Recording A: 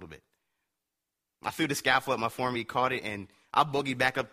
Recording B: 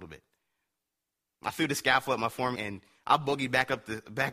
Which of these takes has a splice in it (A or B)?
B